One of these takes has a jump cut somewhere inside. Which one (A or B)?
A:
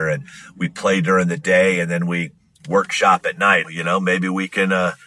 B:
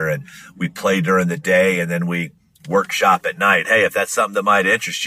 A